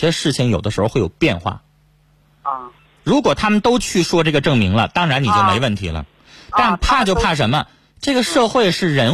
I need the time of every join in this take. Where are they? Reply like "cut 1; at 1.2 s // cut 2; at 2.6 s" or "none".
cut 1; at 2.8 s